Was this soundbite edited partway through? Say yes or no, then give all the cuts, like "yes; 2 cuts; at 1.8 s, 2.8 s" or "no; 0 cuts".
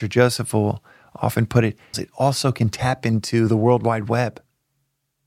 yes; 1 cut; at 1.9 s